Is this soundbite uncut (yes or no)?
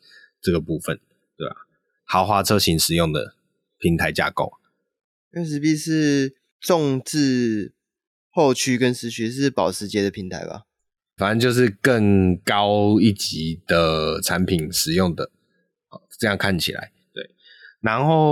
no